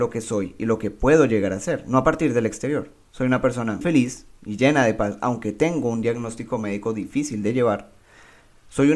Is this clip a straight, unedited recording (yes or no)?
no